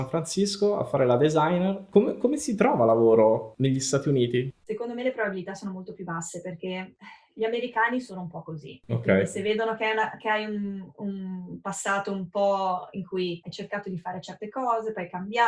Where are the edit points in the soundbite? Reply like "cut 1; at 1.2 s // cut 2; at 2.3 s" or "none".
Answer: cut 1; at 4.6 s